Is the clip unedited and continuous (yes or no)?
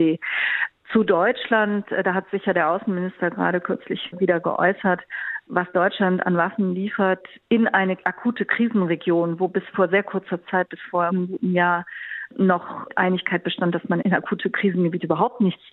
yes